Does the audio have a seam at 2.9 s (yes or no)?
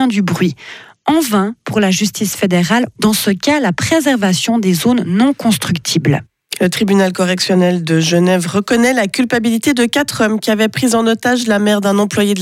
yes